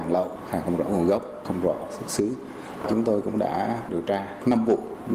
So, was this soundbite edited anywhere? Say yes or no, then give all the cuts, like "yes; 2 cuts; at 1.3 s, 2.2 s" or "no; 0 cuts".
no; 0 cuts